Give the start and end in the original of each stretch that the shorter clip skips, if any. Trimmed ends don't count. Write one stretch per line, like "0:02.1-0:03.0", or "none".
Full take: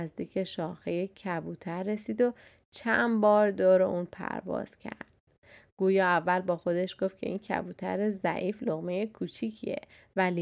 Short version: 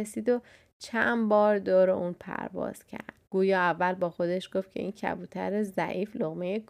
0:05.2-0:05.7